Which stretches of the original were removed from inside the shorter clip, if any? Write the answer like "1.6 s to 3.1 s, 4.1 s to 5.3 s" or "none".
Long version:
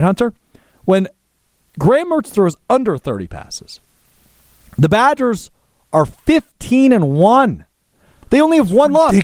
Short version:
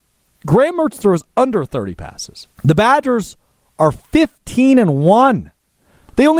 3.9 s to 4.7 s